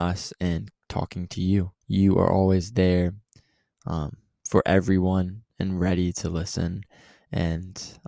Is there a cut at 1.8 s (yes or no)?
yes